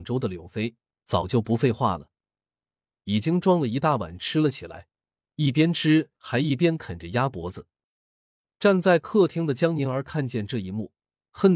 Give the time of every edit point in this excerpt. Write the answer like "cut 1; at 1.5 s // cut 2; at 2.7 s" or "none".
none